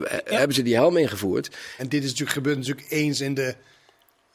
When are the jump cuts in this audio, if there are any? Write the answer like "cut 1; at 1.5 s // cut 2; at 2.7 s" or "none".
cut 1; at 1.8 s